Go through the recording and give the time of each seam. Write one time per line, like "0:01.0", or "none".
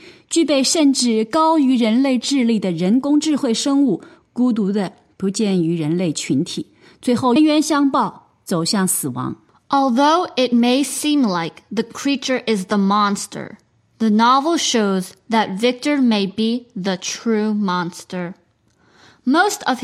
0:07.4

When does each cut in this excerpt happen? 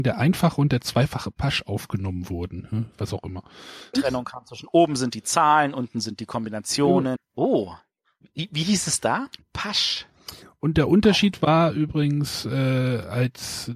0:03.9
0:07.2
0:09.4

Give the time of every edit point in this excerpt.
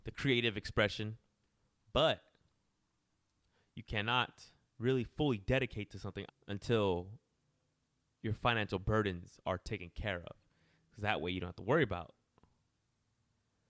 0:06.3

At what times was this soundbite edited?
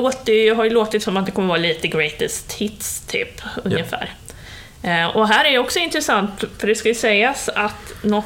none

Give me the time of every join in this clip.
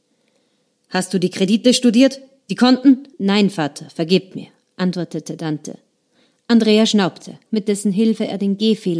0:03.1
0:07.5

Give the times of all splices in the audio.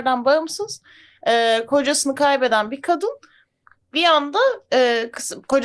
none

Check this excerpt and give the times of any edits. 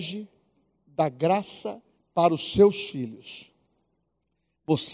0:02.0

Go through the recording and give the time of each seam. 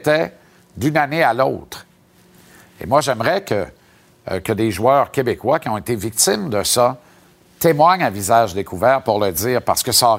none

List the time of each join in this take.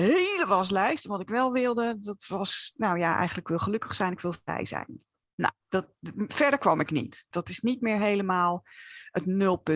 0:07.3

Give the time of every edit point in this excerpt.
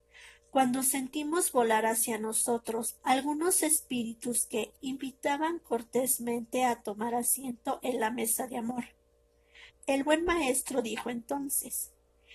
0:03.0
0:04.8
0:09.7

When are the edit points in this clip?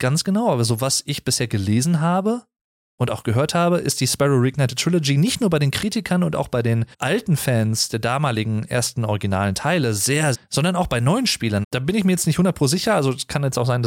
0:06.9
0:10.3
0:11.6

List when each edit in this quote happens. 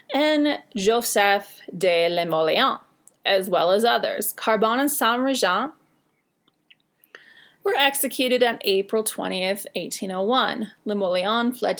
none

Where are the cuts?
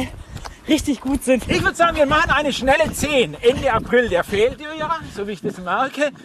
0:01.4

